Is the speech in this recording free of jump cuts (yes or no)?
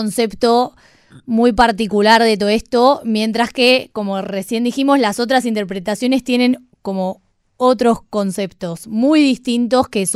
yes